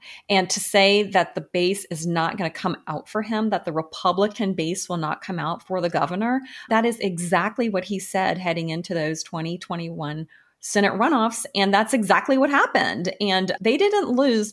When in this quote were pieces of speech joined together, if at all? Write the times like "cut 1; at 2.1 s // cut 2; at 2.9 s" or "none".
cut 1; at 6.7 s // cut 2; at 13.6 s